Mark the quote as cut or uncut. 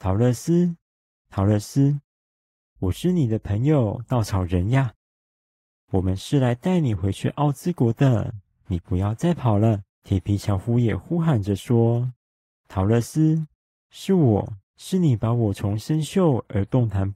cut